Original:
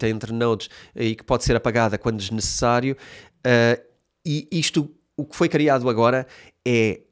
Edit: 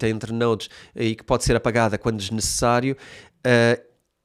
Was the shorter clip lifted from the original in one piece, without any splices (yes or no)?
yes